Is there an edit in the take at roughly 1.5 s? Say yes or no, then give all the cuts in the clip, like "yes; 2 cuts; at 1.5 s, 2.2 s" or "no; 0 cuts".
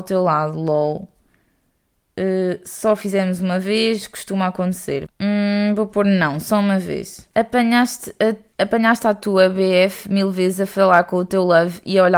no; 3 cuts; at 5.1 s, 7.3 s, 8.5 s